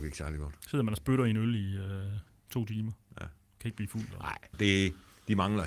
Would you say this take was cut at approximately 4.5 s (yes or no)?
yes